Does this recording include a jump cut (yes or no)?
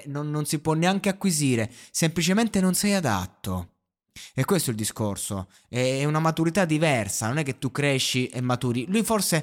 no